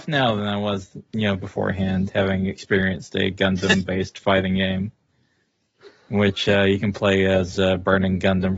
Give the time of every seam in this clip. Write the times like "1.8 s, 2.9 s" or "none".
none